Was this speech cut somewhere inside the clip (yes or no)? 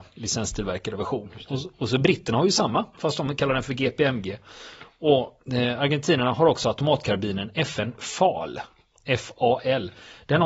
yes